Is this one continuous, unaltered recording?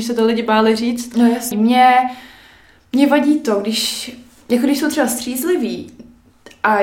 no; 1 cut; at 1.5 s

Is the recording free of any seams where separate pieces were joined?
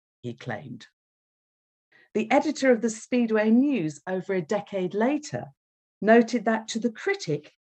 yes; 0 cuts

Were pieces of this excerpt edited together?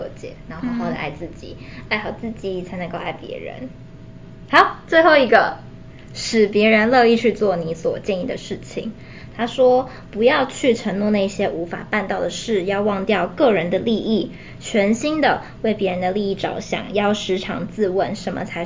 no; 0 cuts

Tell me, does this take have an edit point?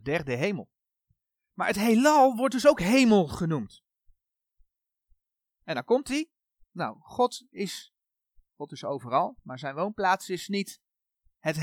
yes; 1 cut; at 6.6 s

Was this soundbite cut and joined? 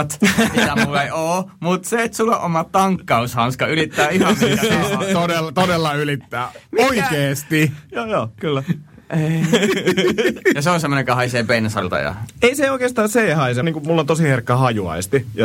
yes; 1 cut; at 13.6 s

